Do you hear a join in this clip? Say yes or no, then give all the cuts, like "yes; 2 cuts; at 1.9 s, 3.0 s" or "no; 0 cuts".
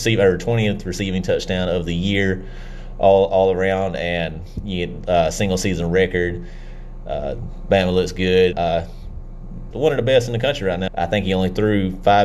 yes; 3 cuts; at 8.5 s, 9.7 s, 10.9 s